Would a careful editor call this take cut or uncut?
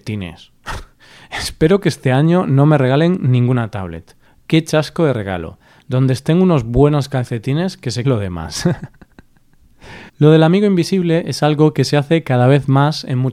cut